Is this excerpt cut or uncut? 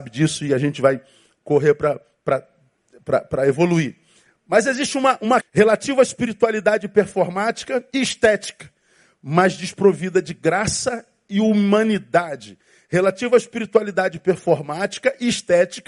cut